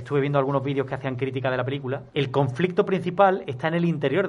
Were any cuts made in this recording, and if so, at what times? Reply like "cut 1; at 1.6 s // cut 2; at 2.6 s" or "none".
cut 1; at 2.1 s